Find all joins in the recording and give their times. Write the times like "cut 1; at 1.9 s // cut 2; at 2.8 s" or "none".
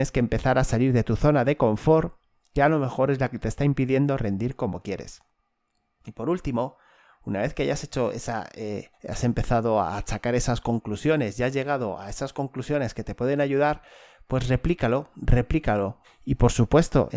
cut 1; at 8.9 s // cut 2; at 16.0 s